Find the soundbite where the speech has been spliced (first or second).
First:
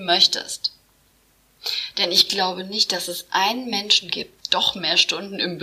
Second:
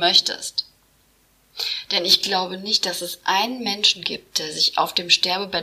first